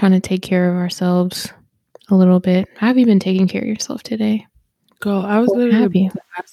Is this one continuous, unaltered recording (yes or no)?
yes